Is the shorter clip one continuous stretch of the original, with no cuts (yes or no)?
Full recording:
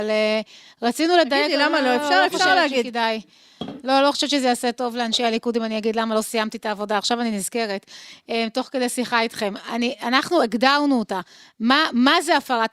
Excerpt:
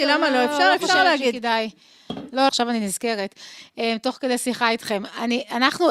no